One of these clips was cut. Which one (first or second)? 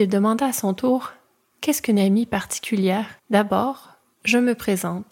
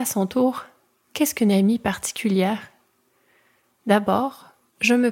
first